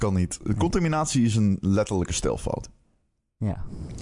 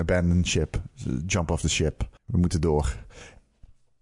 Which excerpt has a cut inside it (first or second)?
second